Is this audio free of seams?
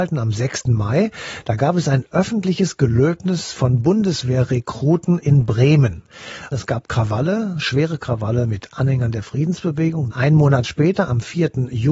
no; 2 cuts; at 6.5 s, 10.1 s

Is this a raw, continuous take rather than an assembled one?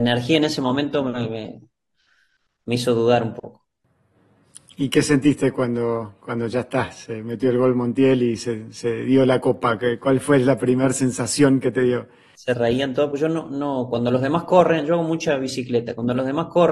yes; 0 cuts

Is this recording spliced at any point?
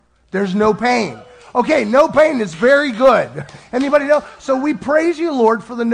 no; 0 cuts

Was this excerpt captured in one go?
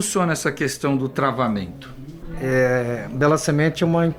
yes; 0 cuts

